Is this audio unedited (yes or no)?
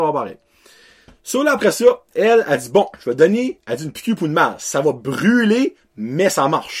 yes